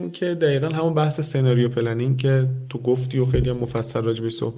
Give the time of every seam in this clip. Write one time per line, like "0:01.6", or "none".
none